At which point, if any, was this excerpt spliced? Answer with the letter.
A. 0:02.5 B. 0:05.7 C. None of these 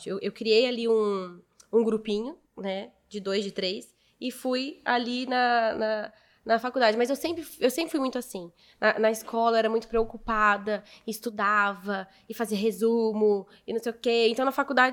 A